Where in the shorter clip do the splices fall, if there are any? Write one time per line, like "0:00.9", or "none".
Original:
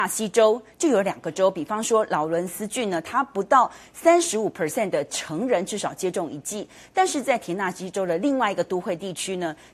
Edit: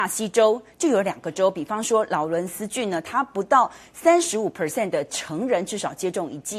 none